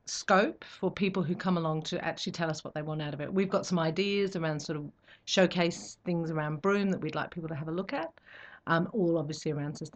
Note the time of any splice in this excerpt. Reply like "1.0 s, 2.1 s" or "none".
none